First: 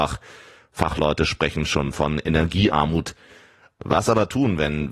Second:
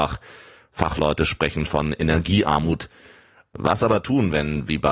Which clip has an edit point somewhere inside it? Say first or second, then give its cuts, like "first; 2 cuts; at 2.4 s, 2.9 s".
second; 1 cut; at 1.7 s